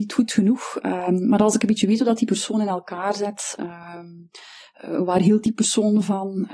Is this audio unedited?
yes; 0 cuts

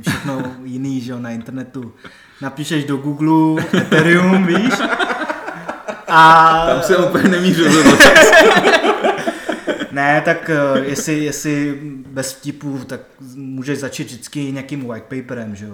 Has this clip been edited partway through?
no; 0 cuts

